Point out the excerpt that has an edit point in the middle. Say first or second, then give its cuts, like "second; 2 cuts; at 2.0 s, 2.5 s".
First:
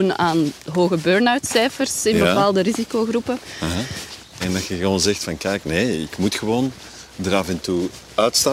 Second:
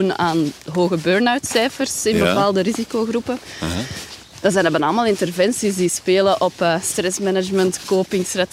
first; 1 cut; at 4.4 s